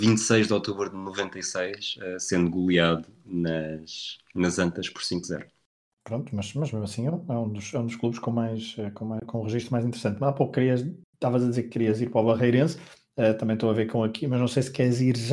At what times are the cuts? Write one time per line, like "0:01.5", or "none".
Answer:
none